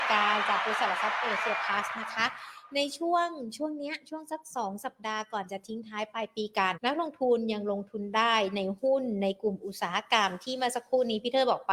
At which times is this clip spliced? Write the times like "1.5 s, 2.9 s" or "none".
6.7 s

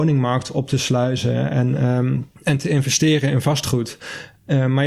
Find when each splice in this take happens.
2.4 s

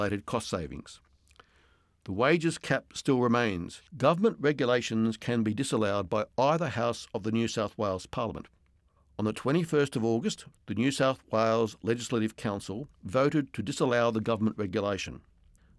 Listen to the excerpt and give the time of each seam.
3.9 s, 10.5 s, 12.9 s

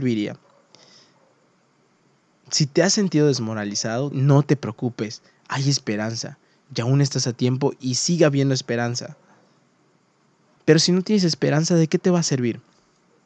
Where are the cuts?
4.1 s, 10.6 s

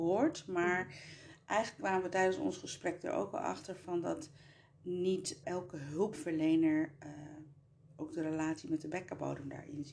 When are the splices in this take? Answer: 5.4 s

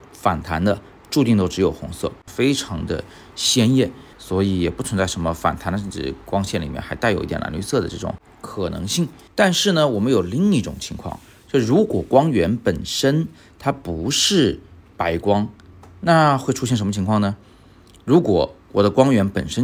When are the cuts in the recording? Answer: 2.3 s, 4.1 s, 9.3 s

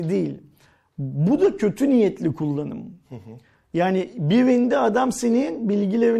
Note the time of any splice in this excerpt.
none

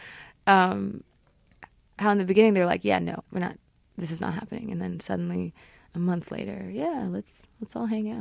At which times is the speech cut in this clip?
3.2 s

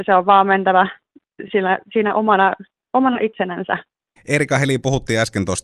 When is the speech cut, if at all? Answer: none

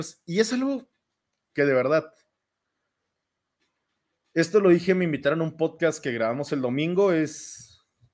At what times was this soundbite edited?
none

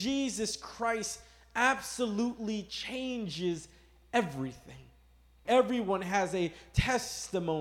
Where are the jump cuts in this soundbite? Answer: 5.4 s

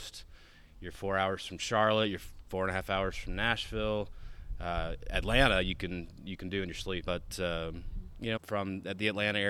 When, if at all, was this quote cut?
7.0 s, 8.4 s

